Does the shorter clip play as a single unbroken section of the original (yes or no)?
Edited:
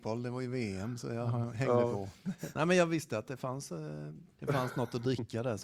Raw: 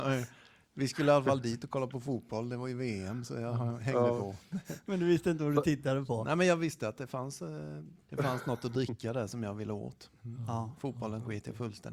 no